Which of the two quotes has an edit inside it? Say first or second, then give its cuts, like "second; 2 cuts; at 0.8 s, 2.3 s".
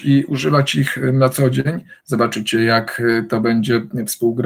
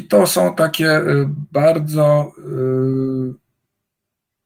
first; 1 cut; at 2.0 s